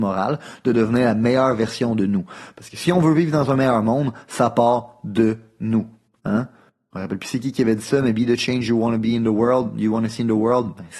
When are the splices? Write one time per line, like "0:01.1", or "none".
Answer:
none